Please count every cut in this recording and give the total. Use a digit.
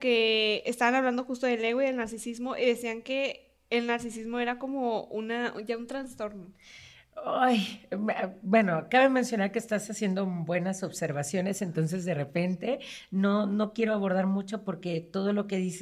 0